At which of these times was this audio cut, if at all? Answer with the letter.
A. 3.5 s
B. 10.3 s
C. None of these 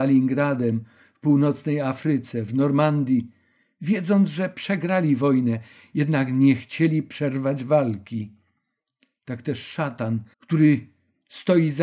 B